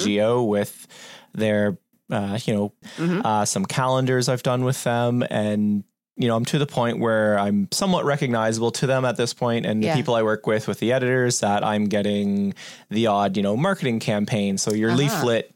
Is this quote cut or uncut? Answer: cut